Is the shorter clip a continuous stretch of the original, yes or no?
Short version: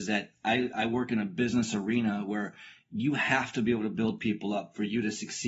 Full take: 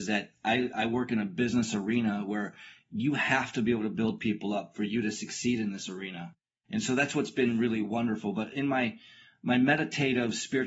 yes